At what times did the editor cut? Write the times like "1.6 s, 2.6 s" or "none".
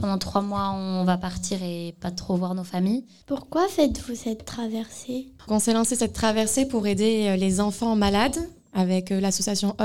3.2 s, 5.5 s